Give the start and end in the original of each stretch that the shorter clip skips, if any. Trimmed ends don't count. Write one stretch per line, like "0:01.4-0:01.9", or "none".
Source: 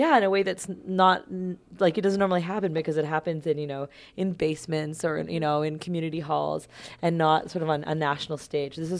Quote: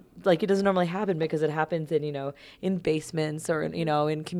none